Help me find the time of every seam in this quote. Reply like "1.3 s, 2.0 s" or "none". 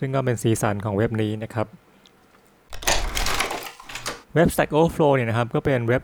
4.2 s